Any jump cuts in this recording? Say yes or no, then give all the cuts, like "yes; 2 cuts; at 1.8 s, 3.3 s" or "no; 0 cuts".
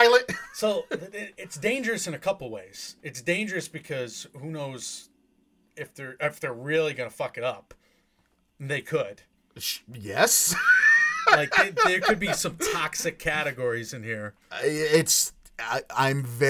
no; 0 cuts